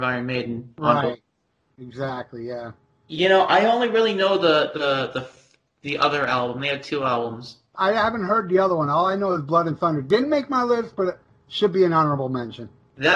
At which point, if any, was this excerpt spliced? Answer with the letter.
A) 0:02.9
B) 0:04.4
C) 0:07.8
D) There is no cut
C